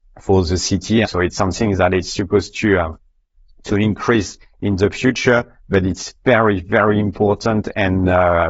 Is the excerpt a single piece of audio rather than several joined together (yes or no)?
no